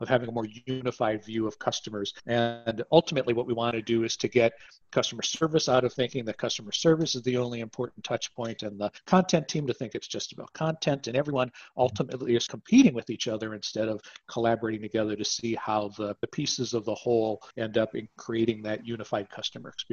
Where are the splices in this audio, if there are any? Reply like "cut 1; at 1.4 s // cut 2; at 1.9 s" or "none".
cut 1; at 8.6 s